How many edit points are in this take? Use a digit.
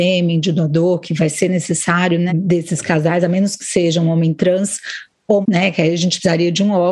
2